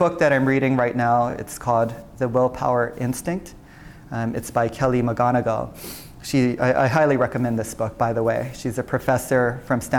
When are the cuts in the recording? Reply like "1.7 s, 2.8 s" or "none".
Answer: none